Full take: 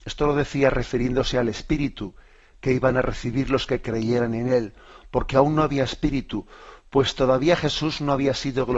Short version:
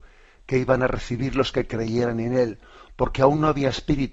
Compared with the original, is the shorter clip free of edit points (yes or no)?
yes